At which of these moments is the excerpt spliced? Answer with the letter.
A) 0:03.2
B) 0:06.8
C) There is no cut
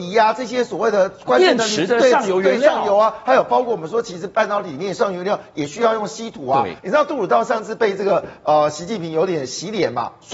B